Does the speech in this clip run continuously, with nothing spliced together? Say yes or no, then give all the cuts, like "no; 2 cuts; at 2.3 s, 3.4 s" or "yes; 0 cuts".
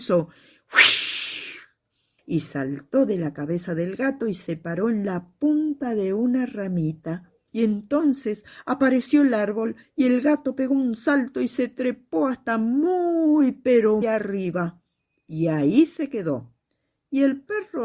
no; 3 cuts; at 2.2 s, 7.5 s, 14.0 s